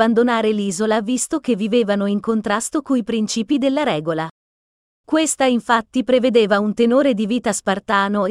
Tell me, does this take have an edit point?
no; 0 cuts

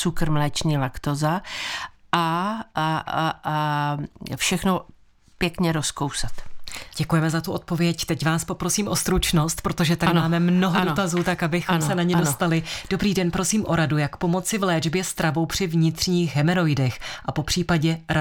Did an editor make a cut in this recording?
no; 0 cuts

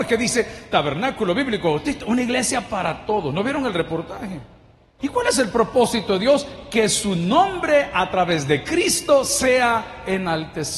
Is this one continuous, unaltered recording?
no; 1 cut; at 5.0 s

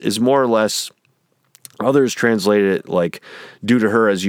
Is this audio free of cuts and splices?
yes; 0 cuts

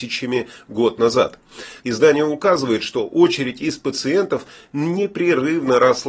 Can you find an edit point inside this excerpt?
yes; 1 cut; at 1.8 s

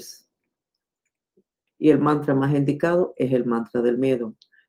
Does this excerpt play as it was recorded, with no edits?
no; 1 cut; at 1.7 s

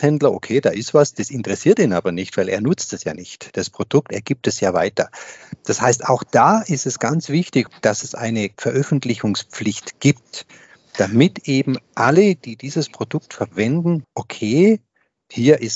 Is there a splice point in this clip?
yes; 1 cut; at 14.0 s

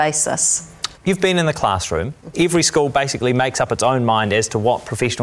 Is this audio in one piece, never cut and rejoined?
no; 2 cuts; at 1.0 s, 2.3 s

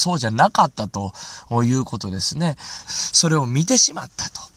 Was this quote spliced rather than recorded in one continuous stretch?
yes; 1 cut; at 2.8 s

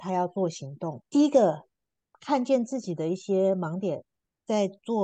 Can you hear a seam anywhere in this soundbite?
no; 0 cuts

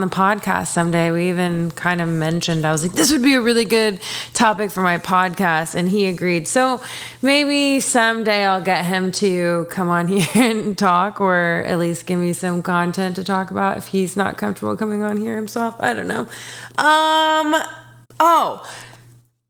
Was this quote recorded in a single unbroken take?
no; 2 cuts; at 16.7 s, 18.0 s

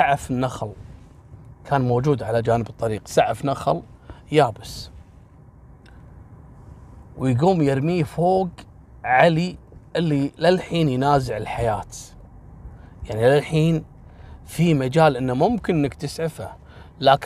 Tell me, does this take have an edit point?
no; 0 cuts

